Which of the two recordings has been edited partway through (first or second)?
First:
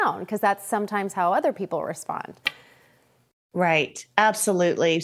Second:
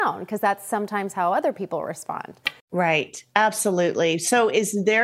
second